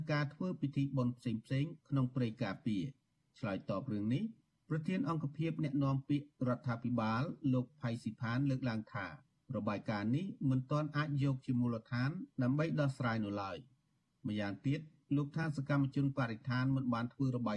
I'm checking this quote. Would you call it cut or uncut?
uncut